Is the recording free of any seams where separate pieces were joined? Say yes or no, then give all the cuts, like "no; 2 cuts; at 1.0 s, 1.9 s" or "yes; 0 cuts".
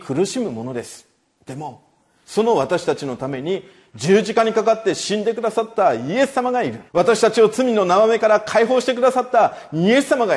no; 1 cut; at 6.9 s